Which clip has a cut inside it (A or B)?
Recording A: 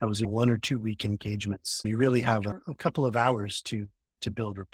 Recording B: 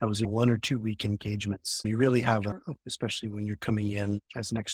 B